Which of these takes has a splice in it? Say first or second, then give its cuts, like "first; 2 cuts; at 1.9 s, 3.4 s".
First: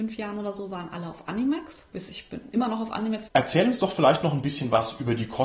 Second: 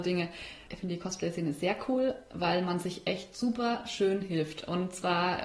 first; 1 cut; at 3.3 s